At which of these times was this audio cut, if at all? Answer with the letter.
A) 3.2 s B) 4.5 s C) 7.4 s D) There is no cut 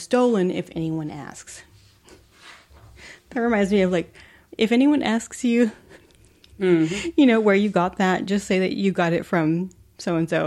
B